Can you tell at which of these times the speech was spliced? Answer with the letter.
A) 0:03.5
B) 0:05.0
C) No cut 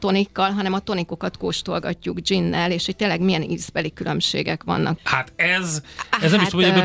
B